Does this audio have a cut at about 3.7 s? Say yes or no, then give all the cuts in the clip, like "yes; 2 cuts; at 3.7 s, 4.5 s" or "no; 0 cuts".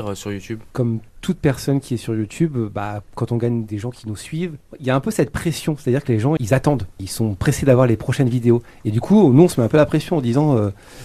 yes; 2 cuts; at 3.7 s, 6.4 s